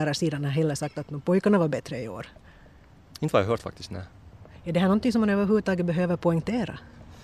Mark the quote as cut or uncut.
uncut